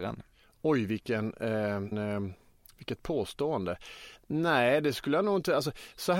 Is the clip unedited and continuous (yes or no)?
no